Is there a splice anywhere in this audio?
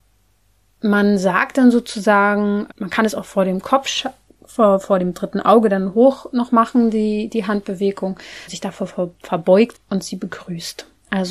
yes; 3 cuts; at 2.7 s, 8.5 s, 9.7 s

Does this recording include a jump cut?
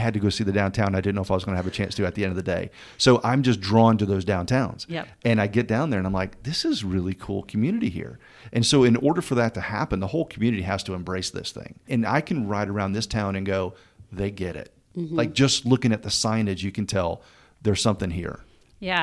no; 0 cuts

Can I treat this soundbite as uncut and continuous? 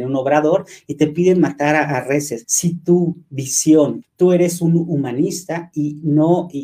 no; 2 cuts; at 2.4 s, 4.0 s

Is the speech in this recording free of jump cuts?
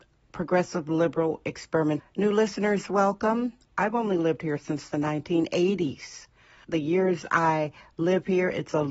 no; 3 cuts; at 2.0 s, 3.7 s, 6.6 s

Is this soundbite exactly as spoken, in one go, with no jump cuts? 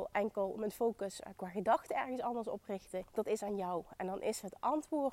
no; 1 cut; at 3.1 s

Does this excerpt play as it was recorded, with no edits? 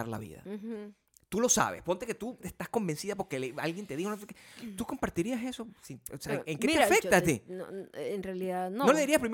yes; 0 cuts

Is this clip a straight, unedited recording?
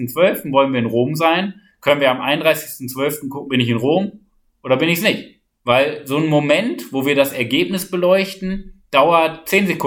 no; 2 cuts; at 3.5 s, 5.6 s

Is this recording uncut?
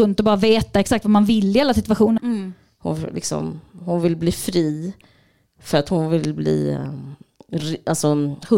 no; 1 cut; at 2.2 s

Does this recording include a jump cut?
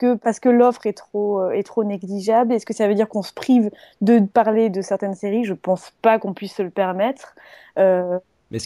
no; 0 cuts

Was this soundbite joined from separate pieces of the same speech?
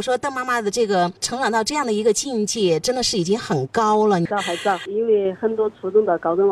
no; 0 cuts

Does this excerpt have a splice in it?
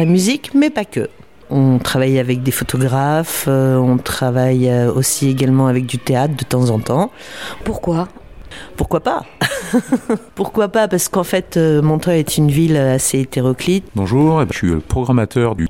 yes; 2 cuts; at 7.6 s, 13.9 s

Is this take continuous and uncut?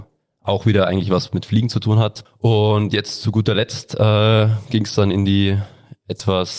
no; 1 cut; at 2.2 s

